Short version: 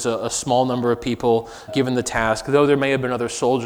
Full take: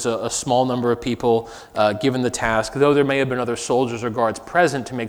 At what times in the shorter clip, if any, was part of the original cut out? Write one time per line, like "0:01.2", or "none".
0:01.7